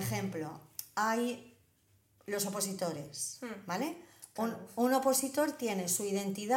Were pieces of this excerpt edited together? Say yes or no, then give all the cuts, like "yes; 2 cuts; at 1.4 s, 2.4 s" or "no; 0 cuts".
no; 0 cuts